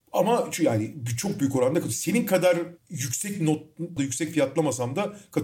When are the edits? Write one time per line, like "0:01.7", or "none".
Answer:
0:04.0